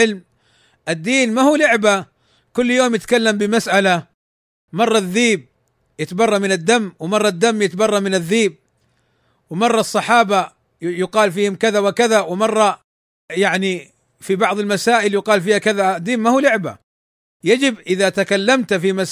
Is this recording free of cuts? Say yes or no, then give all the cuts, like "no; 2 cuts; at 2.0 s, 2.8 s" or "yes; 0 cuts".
yes; 0 cuts